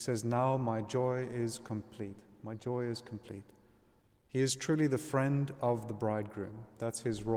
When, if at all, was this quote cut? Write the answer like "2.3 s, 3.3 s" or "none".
none

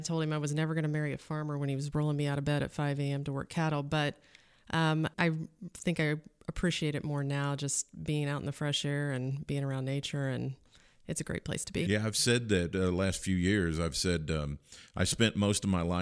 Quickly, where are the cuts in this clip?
5.1 s

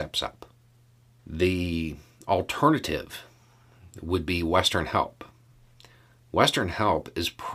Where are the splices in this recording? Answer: 1.2 s

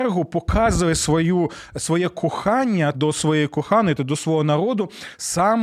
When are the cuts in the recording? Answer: 2.9 s, 4.0 s

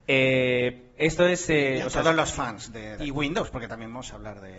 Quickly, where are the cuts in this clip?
3.0 s

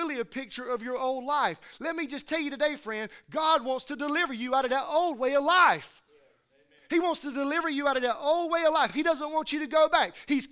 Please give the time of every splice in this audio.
none

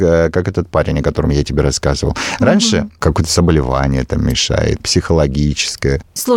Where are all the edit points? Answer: 3.0 s, 4.8 s

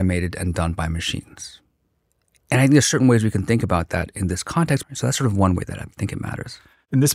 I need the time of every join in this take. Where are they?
4.8 s

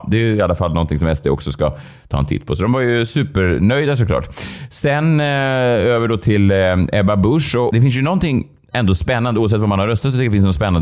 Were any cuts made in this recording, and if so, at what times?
none

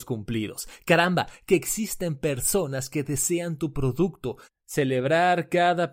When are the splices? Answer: 4.4 s

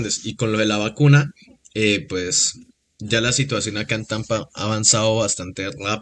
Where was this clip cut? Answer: none

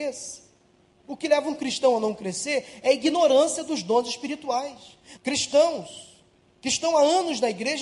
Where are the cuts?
5.2 s

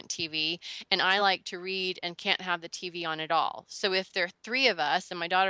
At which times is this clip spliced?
none

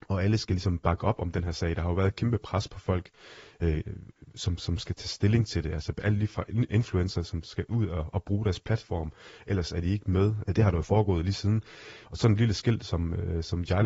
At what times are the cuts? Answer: 10.4 s, 12.0 s

